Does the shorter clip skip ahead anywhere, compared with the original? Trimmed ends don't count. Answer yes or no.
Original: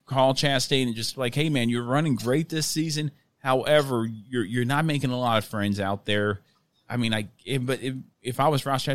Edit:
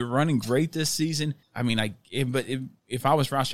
yes